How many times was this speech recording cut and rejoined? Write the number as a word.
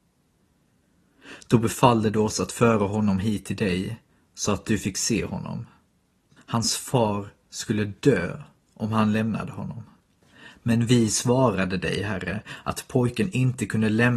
one